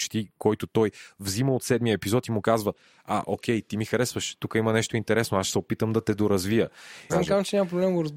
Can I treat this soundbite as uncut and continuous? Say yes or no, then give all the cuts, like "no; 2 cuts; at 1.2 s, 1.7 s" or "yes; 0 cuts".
no; 1 cut; at 7.1 s